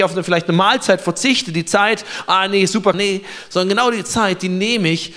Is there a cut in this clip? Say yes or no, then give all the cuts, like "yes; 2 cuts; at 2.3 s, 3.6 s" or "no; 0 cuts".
yes; 1 cut; at 2.9 s